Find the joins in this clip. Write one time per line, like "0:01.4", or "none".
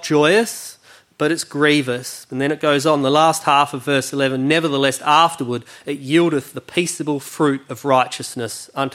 none